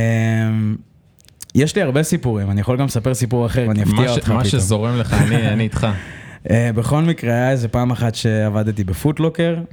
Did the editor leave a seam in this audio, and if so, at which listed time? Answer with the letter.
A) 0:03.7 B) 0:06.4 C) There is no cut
A